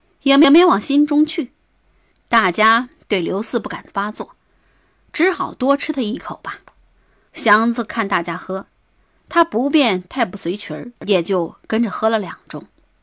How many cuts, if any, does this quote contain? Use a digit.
3